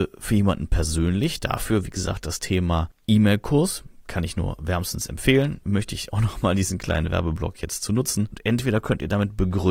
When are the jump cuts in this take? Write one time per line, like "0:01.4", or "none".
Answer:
0:05.6
0:08.3